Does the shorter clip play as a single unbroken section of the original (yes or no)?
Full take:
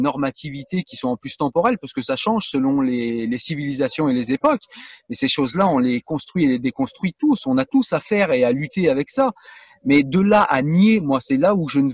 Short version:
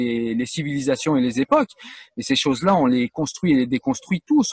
yes